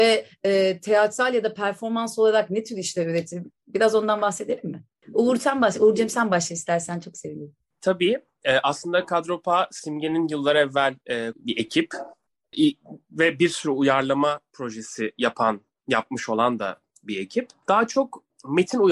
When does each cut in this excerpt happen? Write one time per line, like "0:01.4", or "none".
0:11.3